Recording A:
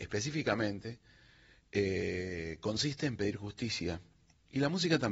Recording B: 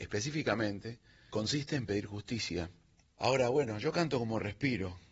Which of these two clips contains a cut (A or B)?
B